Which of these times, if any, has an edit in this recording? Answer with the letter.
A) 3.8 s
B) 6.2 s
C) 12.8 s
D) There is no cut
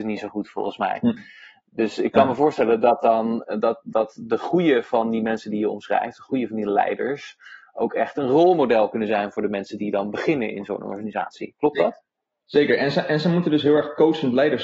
D